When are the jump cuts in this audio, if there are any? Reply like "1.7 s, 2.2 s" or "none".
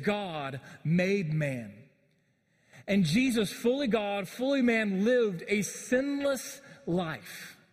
none